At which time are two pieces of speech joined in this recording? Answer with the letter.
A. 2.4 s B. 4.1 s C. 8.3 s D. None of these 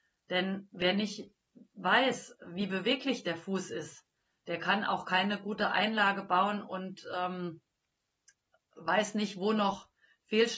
D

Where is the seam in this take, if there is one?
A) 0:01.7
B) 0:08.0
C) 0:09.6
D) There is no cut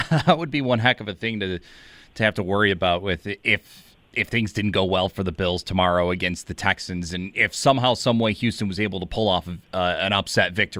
D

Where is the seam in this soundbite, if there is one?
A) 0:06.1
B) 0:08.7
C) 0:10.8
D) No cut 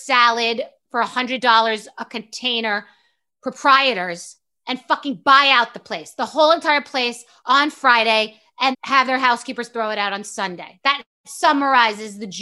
B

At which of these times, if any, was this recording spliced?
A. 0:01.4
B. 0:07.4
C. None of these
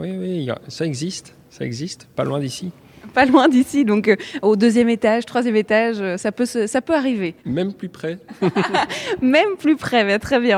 B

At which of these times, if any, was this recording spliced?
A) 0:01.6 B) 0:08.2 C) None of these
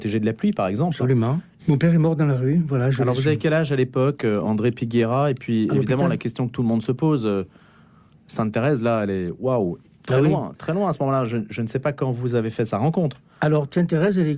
A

